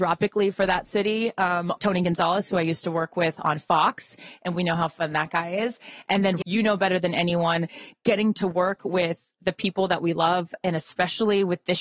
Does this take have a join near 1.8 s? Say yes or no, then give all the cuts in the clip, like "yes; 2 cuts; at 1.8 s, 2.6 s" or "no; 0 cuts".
yes; 2 cuts; at 1.8 s, 6.4 s